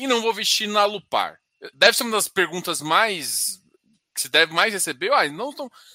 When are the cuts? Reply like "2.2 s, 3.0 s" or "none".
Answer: 1.7 s